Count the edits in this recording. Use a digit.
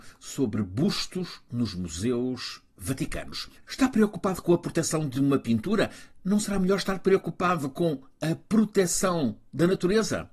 1